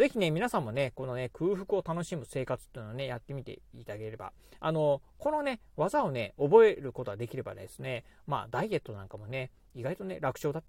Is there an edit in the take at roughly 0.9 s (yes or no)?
no